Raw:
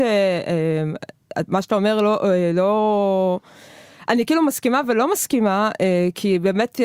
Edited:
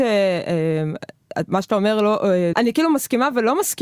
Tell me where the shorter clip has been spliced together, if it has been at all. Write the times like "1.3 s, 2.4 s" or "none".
2.5 s